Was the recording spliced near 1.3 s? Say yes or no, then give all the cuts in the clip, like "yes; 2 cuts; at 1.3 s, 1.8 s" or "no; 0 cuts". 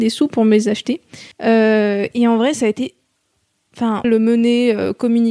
yes; 2 cuts; at 1.3 s, 4.0 s